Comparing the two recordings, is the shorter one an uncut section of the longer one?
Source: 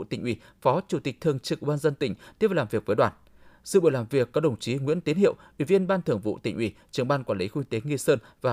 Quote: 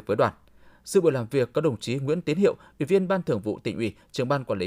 yes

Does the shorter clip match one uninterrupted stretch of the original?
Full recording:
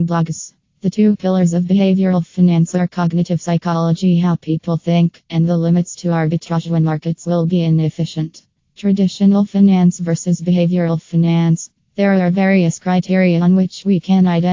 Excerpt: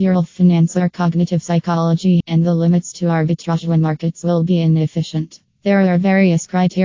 no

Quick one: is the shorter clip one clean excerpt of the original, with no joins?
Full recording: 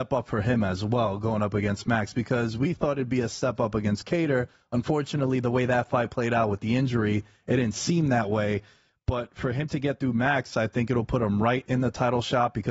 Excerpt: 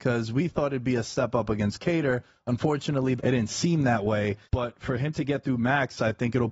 no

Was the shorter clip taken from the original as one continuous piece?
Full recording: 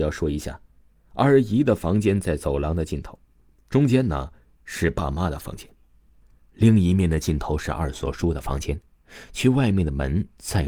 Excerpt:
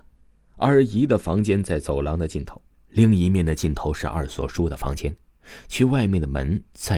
no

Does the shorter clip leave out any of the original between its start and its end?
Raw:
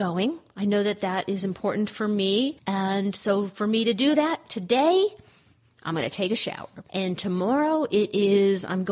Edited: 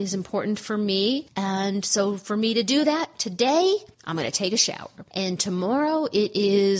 yes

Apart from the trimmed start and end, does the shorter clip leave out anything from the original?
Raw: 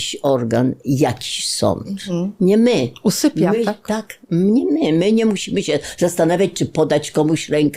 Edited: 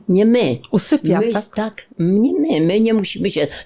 no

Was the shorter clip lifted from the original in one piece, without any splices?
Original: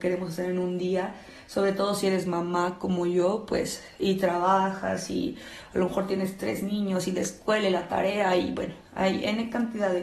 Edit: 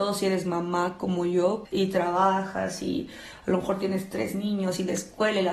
no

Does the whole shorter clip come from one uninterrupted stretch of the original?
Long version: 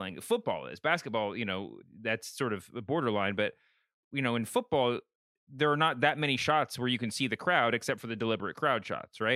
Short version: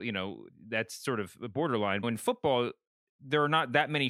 no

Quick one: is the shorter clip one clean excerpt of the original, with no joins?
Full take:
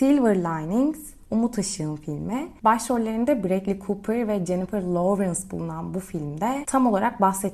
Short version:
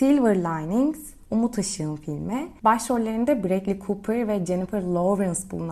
yes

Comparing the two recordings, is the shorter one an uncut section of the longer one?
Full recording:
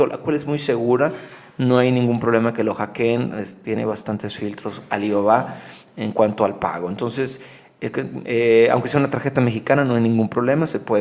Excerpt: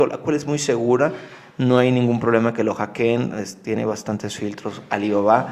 yes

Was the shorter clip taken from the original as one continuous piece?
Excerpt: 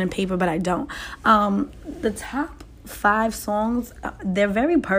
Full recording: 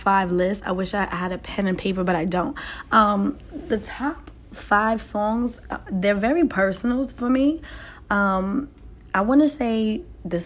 yes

